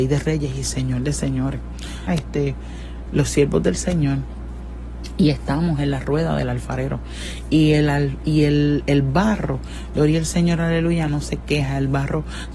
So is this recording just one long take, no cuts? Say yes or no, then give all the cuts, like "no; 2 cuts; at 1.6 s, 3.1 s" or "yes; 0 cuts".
no; 1 cut; at 2.1 s